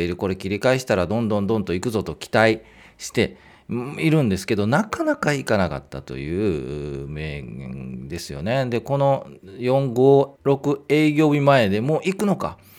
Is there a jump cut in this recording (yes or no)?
yes